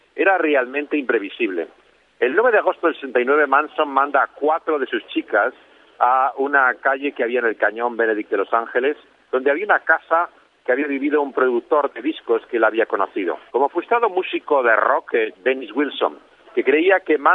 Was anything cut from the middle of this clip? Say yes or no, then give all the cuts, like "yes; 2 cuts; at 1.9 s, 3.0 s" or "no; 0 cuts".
yes; 2 cuts; at 13.5 s, 15.3 s